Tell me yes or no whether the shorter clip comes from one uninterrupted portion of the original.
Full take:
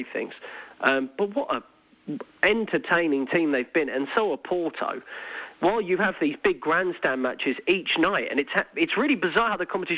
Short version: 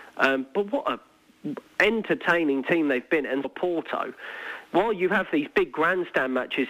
no